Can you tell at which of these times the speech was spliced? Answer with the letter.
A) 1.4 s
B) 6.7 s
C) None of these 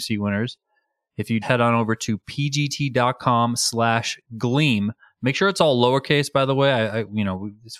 A